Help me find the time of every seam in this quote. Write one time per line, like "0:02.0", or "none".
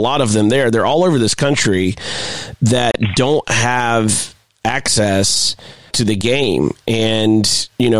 0:05.9